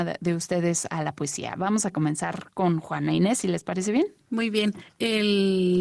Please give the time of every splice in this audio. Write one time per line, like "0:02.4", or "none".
none

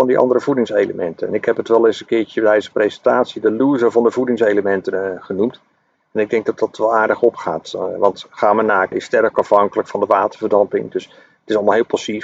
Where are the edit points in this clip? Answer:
0:08.9

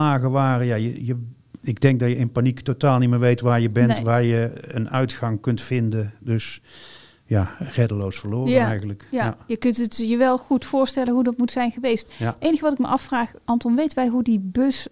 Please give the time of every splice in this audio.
none

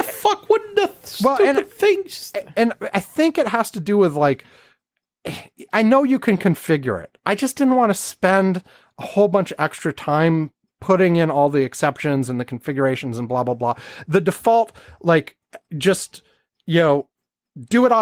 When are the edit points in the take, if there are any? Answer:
none

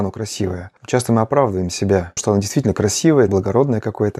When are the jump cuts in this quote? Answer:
0:02.2
0:03.3

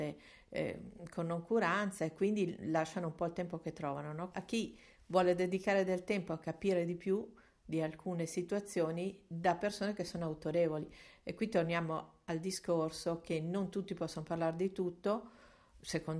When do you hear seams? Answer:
0:04.3

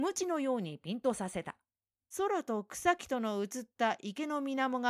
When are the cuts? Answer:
0:02.1

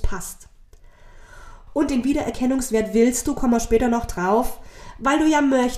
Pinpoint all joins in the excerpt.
0:01.7

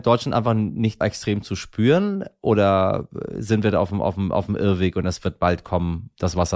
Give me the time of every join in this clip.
0:01.0

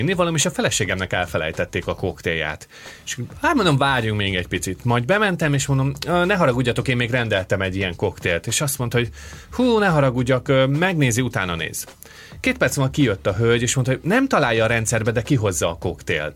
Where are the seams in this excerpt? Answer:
none

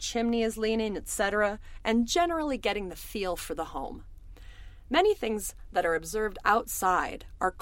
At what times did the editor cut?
none

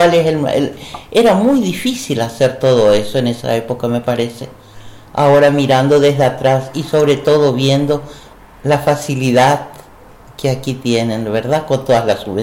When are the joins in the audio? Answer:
none

